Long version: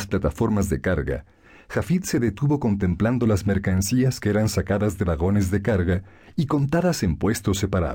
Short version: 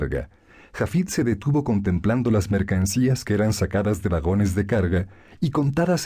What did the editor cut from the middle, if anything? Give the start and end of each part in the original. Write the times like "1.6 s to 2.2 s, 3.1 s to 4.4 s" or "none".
none